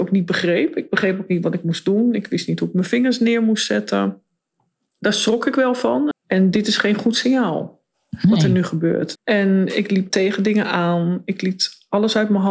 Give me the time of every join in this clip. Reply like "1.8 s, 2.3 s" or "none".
6.1 s, 9.2 s